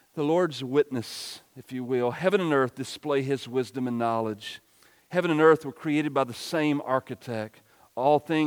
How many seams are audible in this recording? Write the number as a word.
zero